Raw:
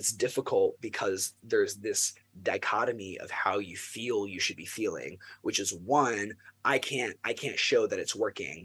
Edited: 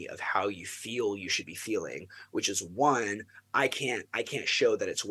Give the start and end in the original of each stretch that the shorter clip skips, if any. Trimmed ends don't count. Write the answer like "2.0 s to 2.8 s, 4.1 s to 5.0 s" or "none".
none